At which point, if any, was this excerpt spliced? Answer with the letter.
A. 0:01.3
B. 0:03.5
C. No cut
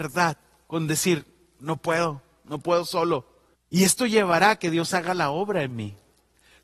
B